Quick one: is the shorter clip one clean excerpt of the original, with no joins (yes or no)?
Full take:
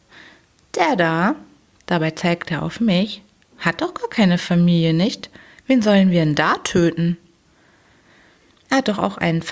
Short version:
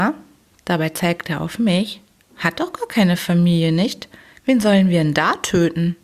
yes